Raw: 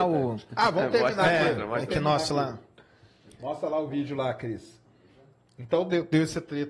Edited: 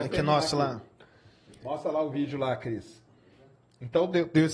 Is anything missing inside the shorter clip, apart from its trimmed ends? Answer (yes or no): no